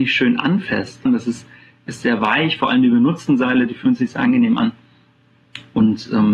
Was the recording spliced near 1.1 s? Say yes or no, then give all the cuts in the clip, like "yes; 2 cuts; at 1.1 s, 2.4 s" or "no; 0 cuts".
yes; 1 cut; at 1.1 s